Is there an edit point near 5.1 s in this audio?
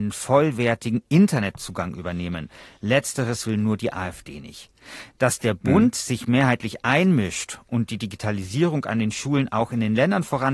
no; 0 cuts

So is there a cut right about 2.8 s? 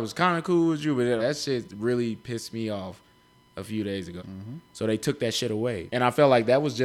no; 3 cuts; at 1.2 s, 4.2 s, 5.9 s

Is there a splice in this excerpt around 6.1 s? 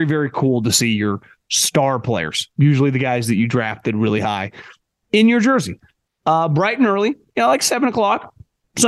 yes; 1 cut; at 6.1 s

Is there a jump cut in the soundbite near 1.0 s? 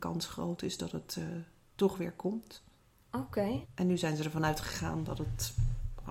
no; 1 cut; at 3.6 s

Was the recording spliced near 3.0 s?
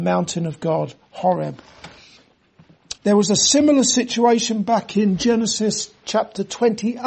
yes; 1 cut; at 3.0 s

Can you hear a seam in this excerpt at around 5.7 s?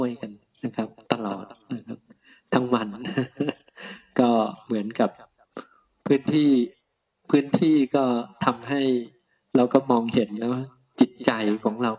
no; 0 cuts

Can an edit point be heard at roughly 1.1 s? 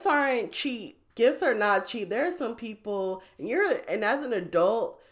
yes; 1 cut; at 1.1 s

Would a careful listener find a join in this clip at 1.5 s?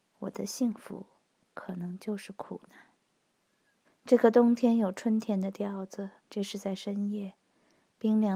no; 2 cuts; at 3.8 s, 6.2 s

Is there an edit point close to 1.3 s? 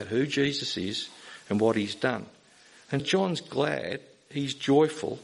no; 1 cut; at 3.0 s

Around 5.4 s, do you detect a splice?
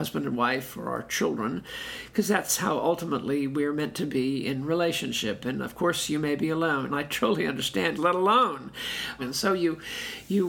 no; 3 cuts; at 6.9 s, 8.0 s, 9.2 s

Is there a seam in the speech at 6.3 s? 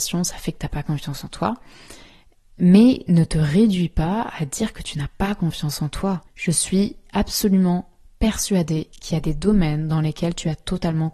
yes; 1 cut; at 6.3 s

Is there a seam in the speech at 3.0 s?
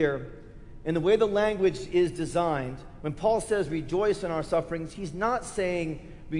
no; 0 cuts

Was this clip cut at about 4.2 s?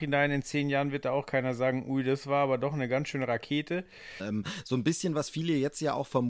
yes; 1 cut; at 4.2 s

